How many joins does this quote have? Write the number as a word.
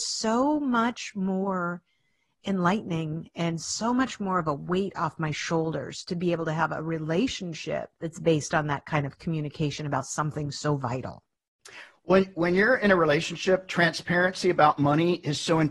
one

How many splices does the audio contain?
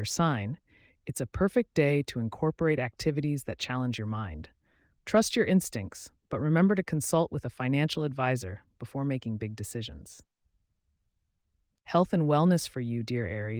one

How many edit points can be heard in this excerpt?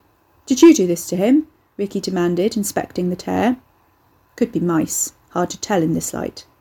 zero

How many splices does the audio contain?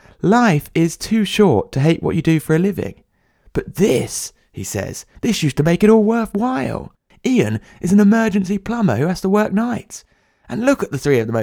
two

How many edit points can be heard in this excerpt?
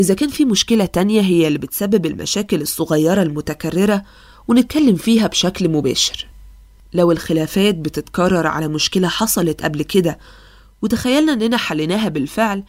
zero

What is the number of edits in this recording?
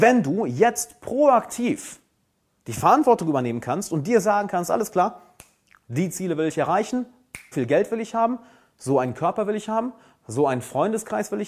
one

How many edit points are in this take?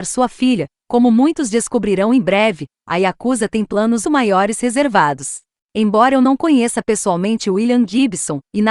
two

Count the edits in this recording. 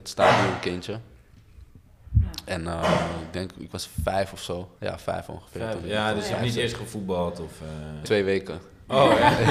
two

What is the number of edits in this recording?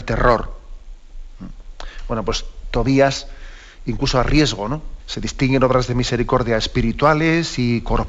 one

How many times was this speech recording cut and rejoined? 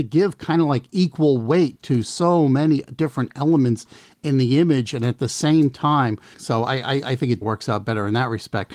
two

